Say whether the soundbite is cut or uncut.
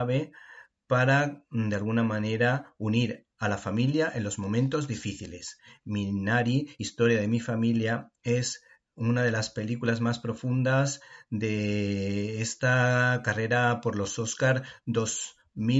uncut